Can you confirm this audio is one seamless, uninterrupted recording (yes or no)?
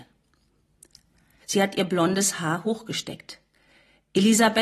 no